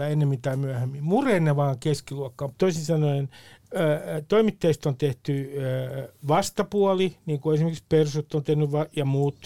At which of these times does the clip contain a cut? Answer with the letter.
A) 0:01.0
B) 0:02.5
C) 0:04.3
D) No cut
B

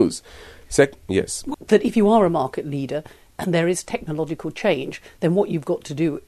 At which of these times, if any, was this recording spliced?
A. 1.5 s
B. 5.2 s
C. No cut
A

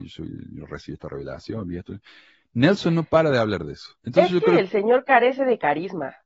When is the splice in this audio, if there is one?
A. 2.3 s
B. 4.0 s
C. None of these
B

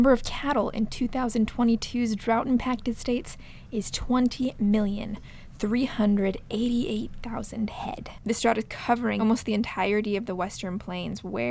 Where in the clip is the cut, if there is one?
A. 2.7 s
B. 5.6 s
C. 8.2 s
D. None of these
D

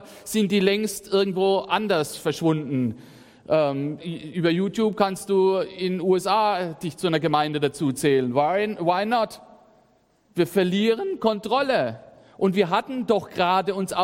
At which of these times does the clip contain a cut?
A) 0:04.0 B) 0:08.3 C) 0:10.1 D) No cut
A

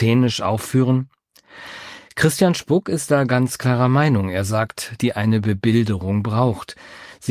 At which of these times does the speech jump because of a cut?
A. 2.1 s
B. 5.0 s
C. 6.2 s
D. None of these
B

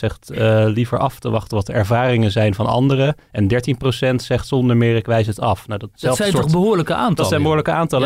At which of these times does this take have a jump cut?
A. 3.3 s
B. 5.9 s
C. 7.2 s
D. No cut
B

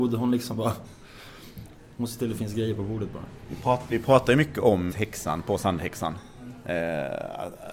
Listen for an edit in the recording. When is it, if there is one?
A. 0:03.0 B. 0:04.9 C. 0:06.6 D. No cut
B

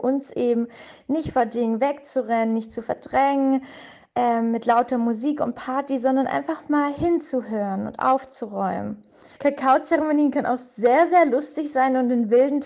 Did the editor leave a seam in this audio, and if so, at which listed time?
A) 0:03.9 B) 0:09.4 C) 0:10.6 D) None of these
B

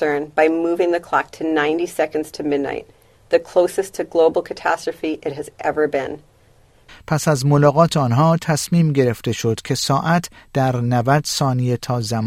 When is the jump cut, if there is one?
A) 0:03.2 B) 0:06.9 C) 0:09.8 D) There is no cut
B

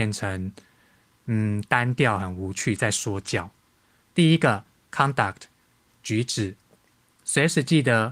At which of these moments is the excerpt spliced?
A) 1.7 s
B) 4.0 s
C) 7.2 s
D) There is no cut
B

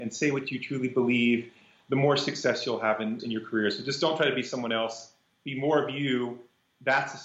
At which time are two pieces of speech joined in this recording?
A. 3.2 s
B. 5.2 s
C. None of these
A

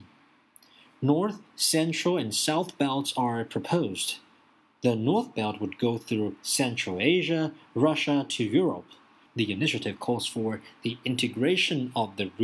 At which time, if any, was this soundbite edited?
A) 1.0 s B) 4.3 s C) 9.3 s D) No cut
C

